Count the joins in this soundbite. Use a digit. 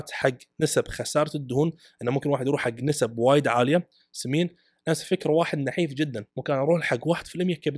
1